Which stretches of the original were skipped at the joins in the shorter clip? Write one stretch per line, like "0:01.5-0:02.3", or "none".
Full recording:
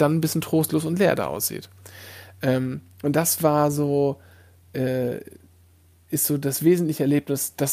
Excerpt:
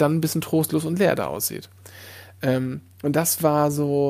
none